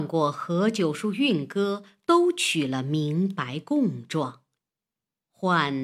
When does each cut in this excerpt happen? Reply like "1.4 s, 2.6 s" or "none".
none

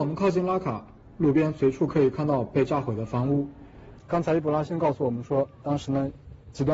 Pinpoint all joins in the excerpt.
4.0 s, 5.6 s

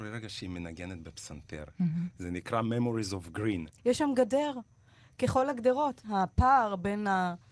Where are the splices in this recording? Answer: 3.8 s, 6.0 s

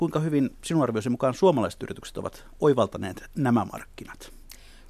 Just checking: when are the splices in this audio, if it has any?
none

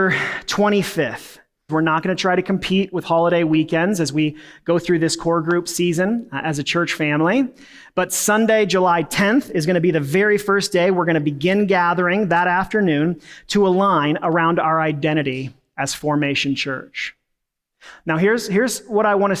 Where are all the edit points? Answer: 1.7 s

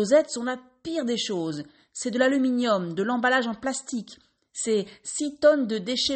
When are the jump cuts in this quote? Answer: none

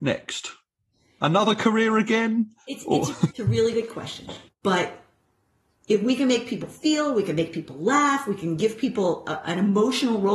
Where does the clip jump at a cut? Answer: 3.3 s, 4.5 s

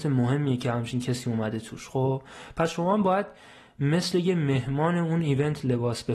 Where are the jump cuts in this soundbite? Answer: none

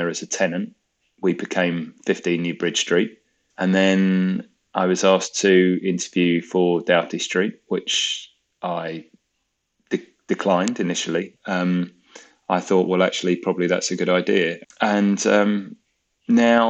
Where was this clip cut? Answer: 3.5 s, 11.4 s, 14.6 s

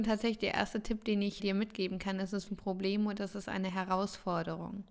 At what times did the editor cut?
1.4 s, 2.5 s

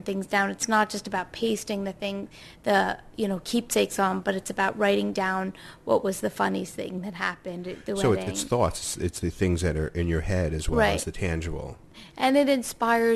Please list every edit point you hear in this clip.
none

